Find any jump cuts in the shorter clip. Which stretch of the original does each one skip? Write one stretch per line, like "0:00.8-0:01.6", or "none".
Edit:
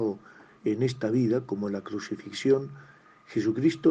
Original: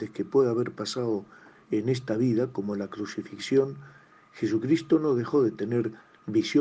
none